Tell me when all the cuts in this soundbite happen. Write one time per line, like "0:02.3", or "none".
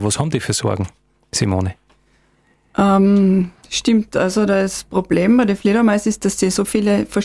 none